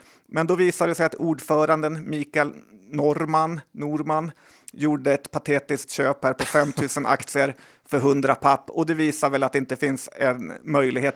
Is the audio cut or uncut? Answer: uncut